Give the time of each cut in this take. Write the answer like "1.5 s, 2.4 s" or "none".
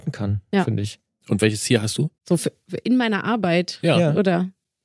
2.2 s